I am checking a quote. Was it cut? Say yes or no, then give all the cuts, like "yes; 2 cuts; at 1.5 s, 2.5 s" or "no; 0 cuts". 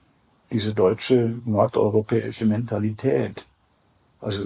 no; 0 cuts